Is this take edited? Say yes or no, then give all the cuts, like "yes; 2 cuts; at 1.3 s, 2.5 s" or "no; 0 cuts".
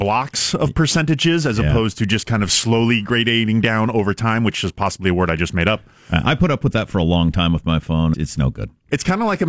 yes; 1 cut; at 8.1 s